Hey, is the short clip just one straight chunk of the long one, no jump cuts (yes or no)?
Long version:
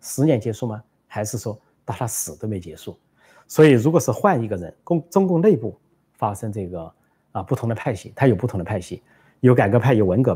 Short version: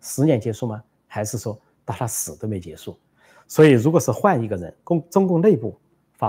yes